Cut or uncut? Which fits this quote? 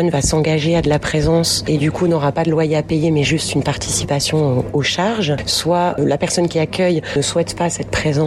uncut